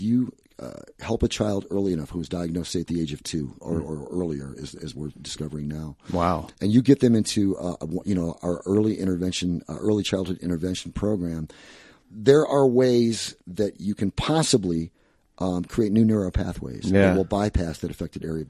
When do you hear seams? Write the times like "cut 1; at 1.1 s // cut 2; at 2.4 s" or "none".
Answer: none